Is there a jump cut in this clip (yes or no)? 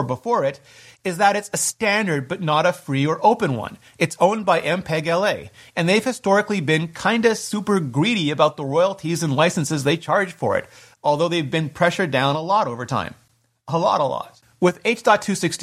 no